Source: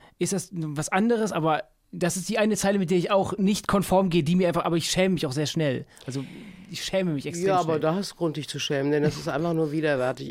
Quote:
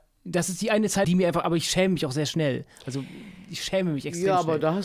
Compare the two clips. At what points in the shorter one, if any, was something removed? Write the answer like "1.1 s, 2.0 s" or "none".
1.0 s